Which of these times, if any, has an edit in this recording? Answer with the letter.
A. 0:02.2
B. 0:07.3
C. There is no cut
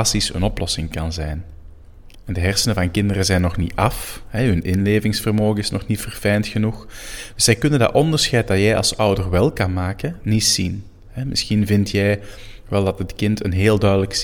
C